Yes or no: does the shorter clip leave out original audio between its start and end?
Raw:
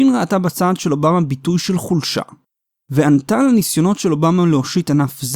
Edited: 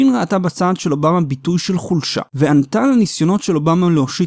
yes